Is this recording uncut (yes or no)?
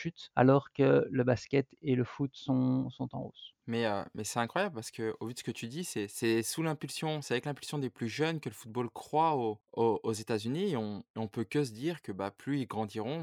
yes